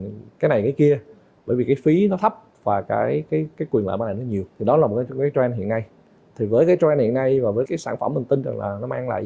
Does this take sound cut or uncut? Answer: cut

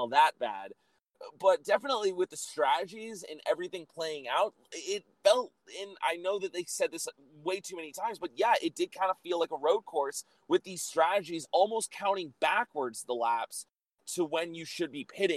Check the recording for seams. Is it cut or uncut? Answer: uncut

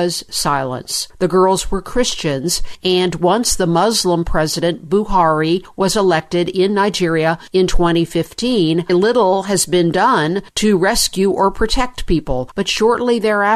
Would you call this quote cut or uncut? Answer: cut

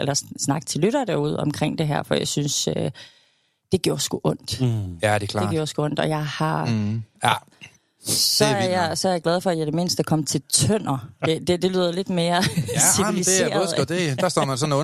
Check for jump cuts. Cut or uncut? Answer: cut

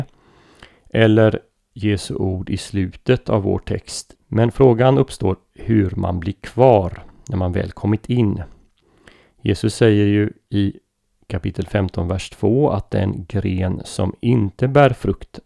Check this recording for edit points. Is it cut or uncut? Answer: cut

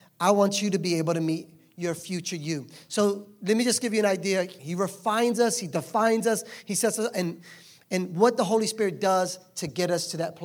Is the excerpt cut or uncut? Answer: cut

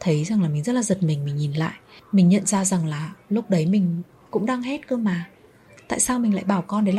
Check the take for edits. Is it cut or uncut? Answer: uncut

